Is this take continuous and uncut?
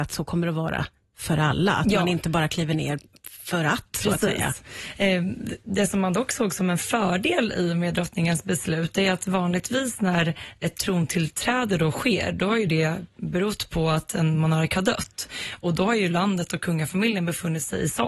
yes; 0 cuts

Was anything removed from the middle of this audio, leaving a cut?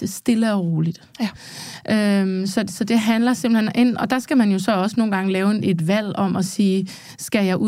no; 0 cuts

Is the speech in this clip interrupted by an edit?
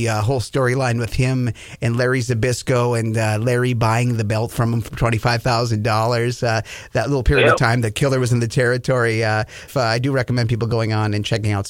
yes; 1 cut; at 9.7 s

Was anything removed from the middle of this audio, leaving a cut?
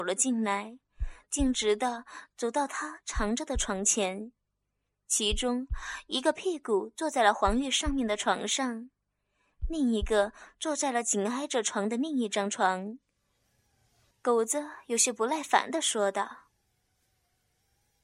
yes; 1 cut; at 14.1 s

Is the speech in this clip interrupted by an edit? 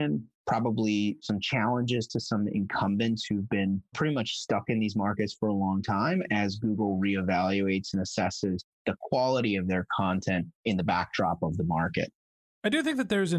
no; 0 cuts

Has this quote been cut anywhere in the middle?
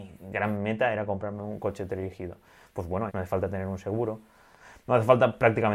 yes; 1 cut; at 3.1 s

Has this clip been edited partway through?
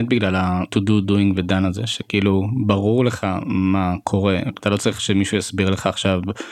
no; 0 cuts

